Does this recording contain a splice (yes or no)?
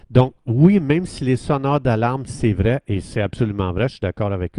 yes